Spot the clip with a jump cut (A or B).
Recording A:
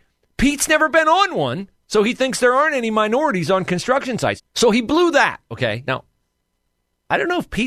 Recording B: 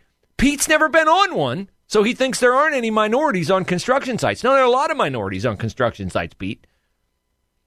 A